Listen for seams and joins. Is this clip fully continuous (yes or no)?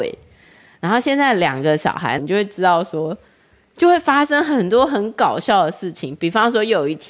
no